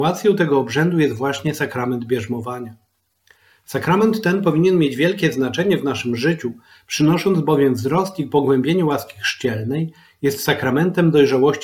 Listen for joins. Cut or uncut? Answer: uncut